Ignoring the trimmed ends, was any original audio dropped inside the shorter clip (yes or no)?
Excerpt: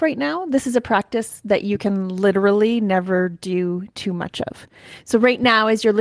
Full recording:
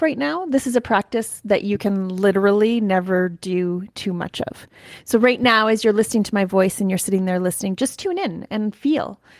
no